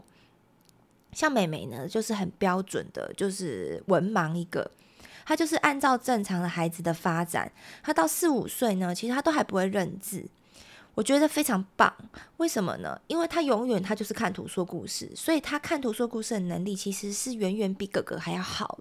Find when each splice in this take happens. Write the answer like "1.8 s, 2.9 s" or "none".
none